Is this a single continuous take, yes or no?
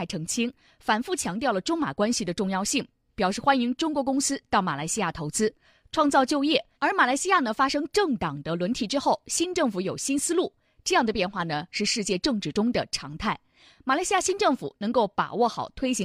no